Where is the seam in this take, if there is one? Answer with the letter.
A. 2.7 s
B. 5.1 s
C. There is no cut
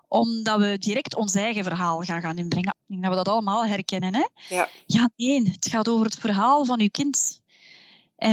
A